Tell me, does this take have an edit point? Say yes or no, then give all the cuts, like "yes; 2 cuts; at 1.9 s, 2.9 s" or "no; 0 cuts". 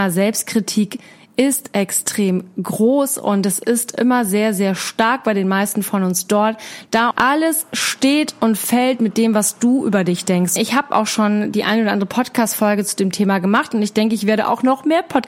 yes; 2 cuts; at 7.1 s, 10.6 s